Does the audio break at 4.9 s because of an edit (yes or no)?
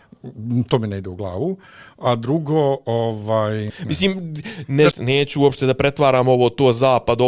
yes